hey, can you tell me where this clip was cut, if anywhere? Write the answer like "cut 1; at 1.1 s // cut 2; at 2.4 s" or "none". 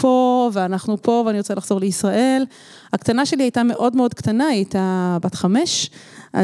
none